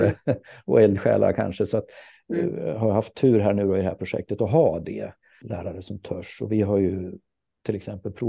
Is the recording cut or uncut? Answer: cut